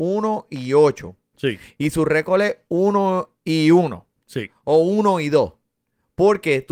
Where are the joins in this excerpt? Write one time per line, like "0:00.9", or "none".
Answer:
0:01.3